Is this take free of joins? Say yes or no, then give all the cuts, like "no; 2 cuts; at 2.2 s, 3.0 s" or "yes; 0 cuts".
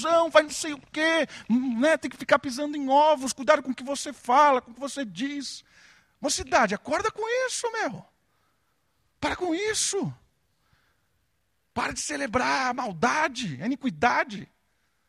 no; 1 cut; at 11.6 s